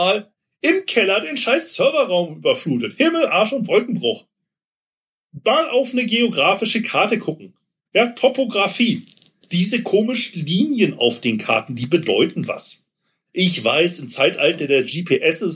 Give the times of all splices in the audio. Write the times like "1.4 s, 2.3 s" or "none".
none